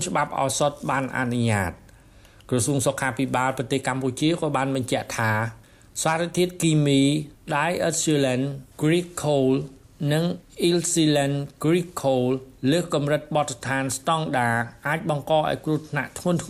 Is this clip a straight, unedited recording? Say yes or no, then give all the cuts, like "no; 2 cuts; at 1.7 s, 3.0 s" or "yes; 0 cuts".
yes; 0 cuts